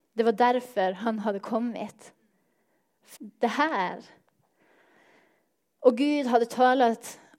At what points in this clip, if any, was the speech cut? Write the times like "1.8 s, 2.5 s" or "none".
3.2 s